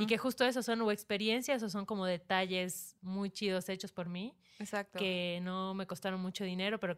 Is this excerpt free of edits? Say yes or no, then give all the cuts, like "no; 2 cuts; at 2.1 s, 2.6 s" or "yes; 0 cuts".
yes; 0 cuts